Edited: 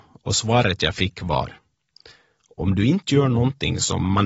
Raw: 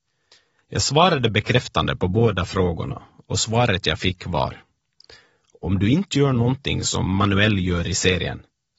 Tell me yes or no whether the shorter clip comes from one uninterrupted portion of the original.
yes